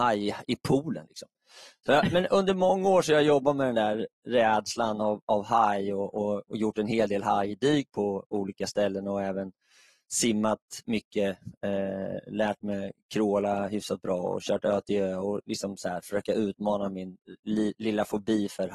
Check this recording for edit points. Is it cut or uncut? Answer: uncut